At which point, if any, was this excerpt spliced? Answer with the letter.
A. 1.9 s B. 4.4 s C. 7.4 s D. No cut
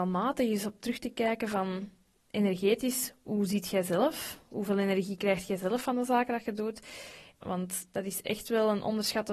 C